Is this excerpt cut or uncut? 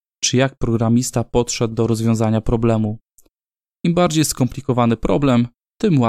uncut